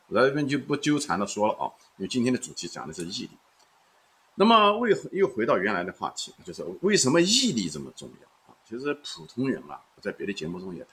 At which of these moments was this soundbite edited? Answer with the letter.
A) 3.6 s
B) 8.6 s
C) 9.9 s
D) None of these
D